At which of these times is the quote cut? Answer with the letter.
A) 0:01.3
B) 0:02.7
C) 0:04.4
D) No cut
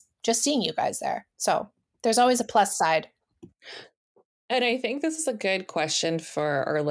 A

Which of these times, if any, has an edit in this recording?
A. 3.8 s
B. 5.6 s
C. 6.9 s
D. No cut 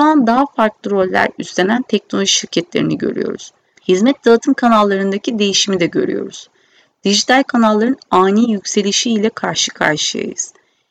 A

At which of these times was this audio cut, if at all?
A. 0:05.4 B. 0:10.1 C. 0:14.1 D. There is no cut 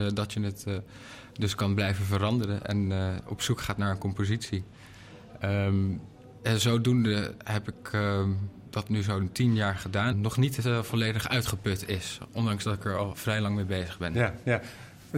B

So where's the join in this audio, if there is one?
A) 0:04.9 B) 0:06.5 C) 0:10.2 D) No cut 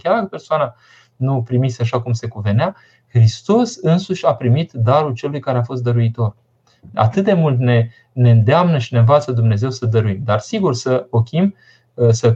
D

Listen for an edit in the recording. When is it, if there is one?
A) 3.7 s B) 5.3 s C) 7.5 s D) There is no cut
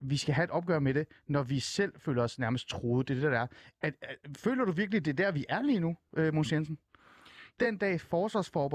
C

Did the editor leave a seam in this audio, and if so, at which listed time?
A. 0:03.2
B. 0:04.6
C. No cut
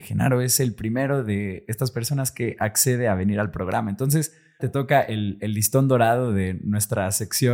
B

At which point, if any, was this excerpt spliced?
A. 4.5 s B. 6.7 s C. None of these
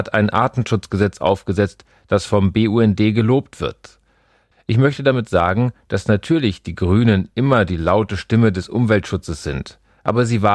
A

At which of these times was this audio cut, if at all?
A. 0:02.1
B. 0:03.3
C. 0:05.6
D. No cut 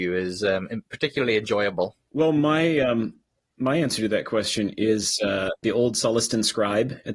C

